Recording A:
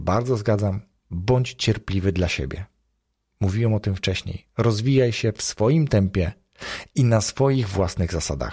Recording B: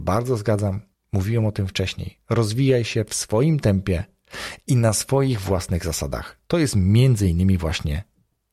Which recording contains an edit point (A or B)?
B